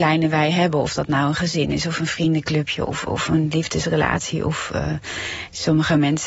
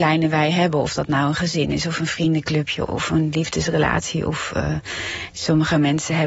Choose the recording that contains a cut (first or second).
second